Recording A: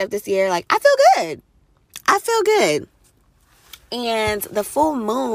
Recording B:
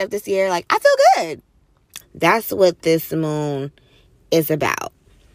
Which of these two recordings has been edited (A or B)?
B